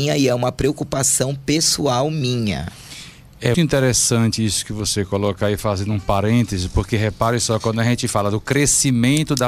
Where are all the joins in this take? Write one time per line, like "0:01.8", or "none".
0:03.5